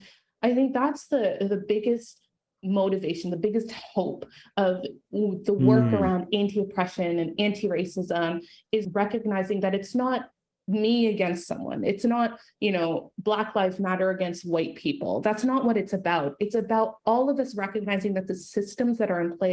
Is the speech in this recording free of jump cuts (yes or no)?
no